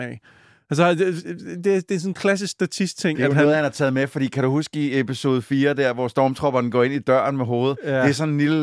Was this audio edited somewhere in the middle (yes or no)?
no